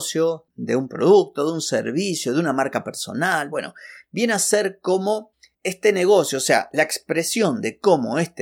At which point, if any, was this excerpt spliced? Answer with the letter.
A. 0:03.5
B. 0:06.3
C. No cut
C